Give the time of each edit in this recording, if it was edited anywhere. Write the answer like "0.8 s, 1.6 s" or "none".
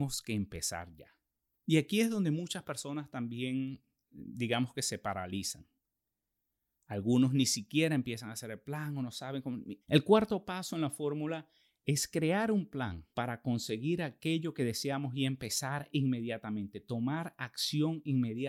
9.8 s, 13.1 s